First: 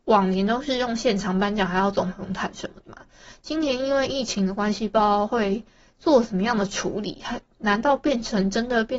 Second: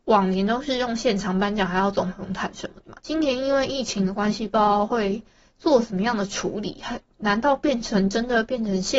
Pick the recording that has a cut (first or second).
second